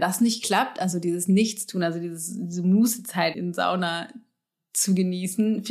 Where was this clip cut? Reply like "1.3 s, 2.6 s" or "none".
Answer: 3.3 s